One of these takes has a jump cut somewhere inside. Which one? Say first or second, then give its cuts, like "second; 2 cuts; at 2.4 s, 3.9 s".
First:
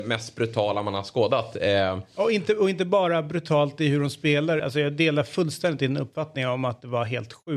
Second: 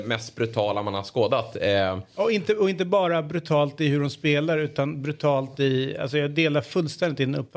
first; 1 cut; at 4.6 s